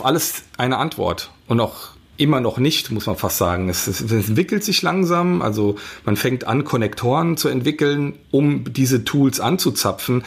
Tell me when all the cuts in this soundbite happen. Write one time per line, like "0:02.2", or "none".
none